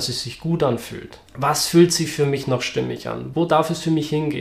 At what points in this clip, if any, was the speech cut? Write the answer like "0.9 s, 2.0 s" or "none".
1.3 s, 3.3 s